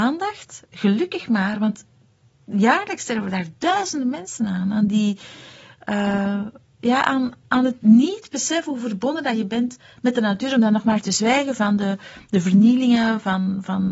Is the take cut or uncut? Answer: uncut